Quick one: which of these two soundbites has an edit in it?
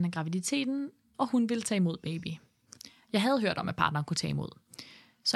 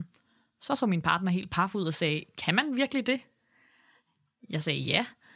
first; 1 cut; at 1.1 s

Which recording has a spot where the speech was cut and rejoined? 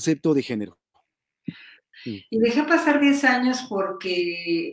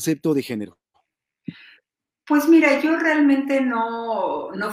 first; 1 cut; at 1.9 s

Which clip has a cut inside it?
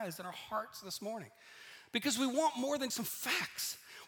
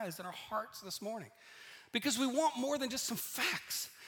first; 1 cut; at 2.9 s

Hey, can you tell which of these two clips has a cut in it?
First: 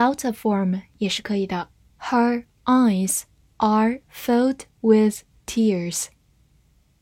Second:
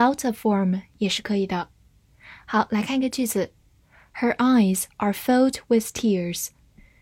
first; 1 cut; at 1.9 s

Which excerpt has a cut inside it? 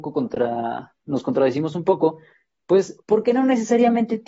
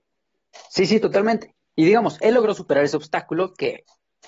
second; 1 cut; at 2.2 s

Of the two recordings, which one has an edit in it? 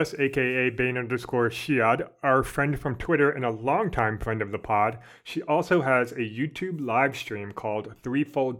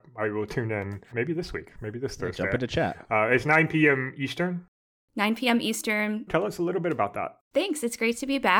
second; 2 cuts; at 1.1 s, 6.3 s

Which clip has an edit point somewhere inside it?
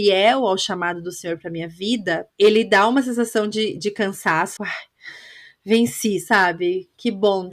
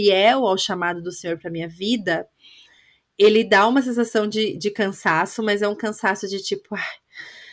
first; 2 cuts; at 2.3 s, 4.6 s

